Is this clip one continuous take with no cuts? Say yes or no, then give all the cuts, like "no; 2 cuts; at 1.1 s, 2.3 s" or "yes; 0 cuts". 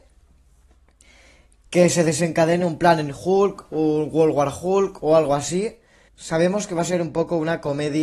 no; 1 cut; at 6.1 s